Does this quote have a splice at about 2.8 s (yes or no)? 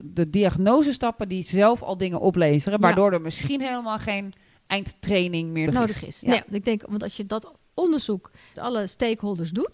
no